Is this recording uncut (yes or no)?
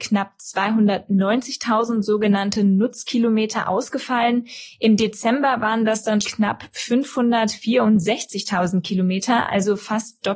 no